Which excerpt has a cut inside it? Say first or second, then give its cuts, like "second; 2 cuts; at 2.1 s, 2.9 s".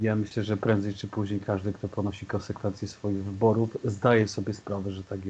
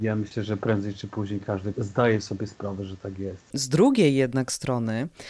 second; 2 cuts; at 1.7 s, 3.5 s